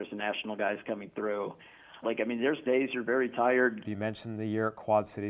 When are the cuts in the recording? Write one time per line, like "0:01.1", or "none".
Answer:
0:02.0
0:03.8

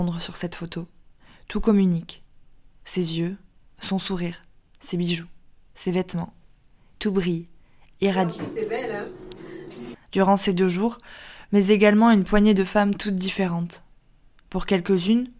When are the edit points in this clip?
0:09.9
0:11.5

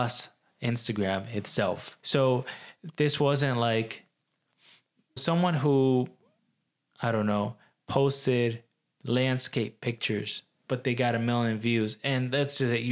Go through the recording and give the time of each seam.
0:02.0
0:05.2

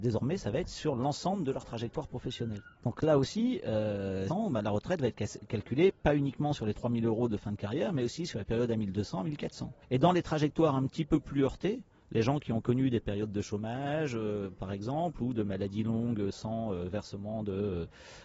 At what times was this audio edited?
0:02.7
0:04.3
0:09.8

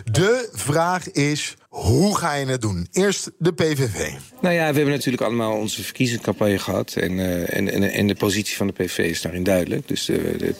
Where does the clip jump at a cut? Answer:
0:01.6

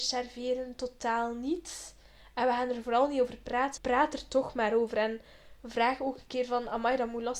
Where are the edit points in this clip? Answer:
0:03.8

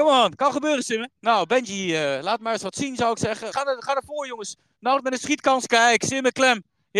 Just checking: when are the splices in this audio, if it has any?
0:01.2
0:03.5

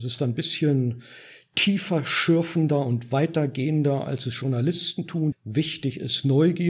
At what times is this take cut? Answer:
0:05.3

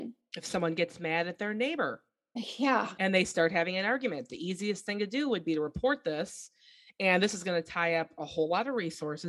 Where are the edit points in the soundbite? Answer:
none

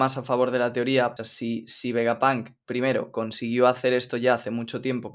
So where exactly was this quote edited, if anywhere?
0:01.2

